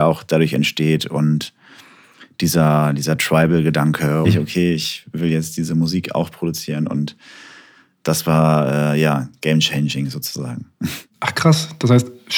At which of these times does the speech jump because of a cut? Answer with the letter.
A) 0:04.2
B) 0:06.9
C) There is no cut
A